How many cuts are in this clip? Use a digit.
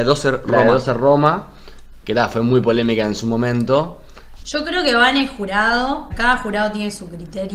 2